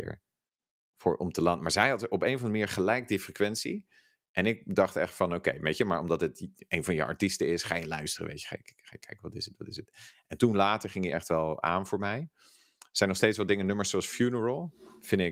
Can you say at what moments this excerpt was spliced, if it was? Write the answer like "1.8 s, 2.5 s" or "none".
none